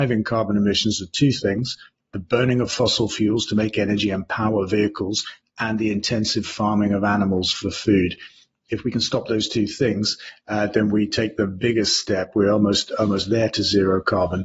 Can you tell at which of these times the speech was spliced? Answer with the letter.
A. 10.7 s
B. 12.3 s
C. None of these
C